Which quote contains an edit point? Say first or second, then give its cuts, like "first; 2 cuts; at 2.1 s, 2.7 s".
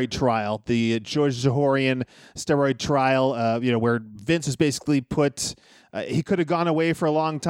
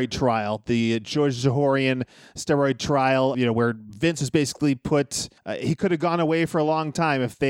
second; 2 cuts; at 3.3 s, 5.4 s